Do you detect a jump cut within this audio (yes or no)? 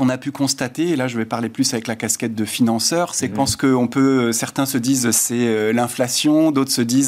yes